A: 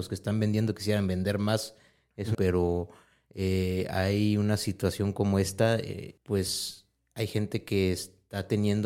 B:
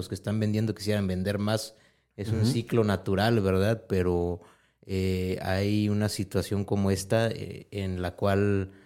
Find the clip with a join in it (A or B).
A